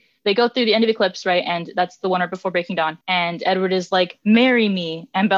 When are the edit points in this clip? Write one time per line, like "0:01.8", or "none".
0:03.0